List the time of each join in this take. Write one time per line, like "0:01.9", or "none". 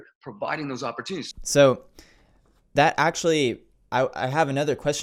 0:01.3